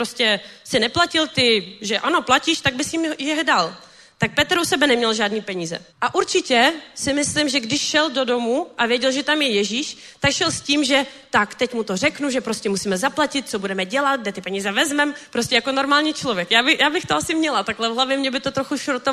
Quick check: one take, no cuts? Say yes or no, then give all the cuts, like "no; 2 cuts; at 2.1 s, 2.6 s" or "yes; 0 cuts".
no; 1 cut; at 5.9 s